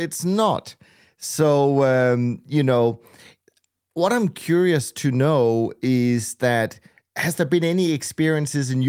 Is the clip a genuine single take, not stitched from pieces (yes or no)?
yes